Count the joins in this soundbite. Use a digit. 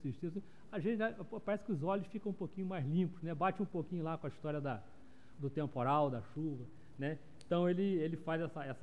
0